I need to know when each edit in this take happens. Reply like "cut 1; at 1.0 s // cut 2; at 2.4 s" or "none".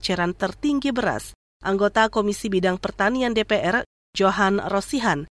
none